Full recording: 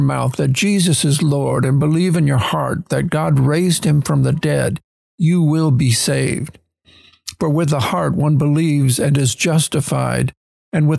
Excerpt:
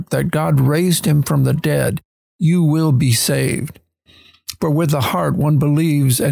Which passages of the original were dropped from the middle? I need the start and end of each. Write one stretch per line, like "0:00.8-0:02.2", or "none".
none